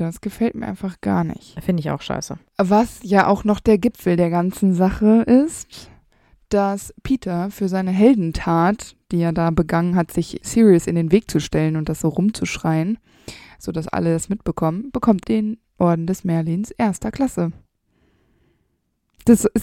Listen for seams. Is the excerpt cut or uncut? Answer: cut